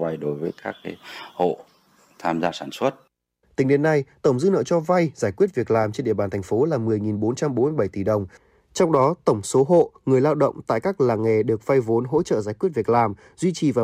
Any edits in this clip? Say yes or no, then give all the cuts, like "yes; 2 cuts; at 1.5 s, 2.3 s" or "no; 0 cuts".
no; 0 cuts